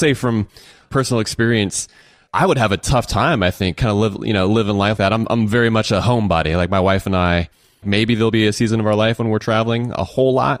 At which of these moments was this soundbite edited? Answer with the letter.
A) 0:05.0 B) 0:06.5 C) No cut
A